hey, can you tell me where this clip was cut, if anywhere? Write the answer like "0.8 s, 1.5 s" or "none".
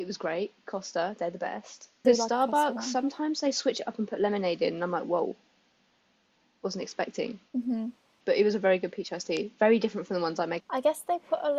2.0 s, 7.5 s, 10.6 s

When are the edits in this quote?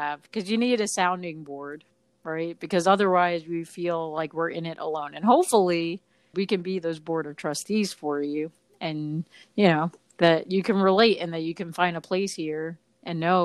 6.3 s

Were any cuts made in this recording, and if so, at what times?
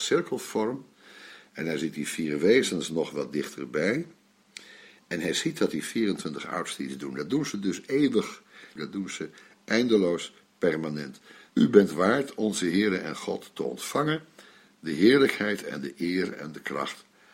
8.8 s, 11.5 s

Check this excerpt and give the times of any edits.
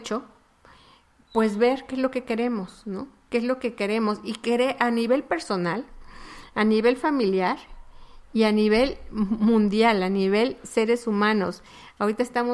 none

